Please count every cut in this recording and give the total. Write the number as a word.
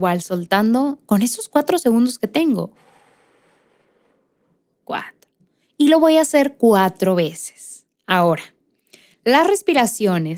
zero